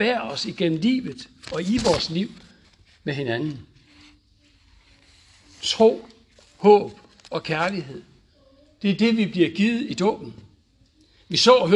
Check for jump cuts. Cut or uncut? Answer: uncut